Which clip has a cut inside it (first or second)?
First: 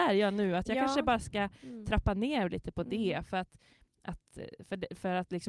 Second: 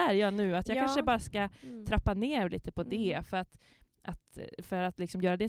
second